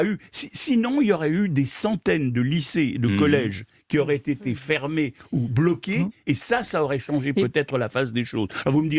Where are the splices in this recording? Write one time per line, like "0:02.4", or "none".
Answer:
none